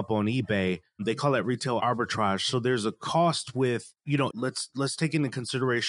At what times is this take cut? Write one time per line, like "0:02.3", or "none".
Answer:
0:04.3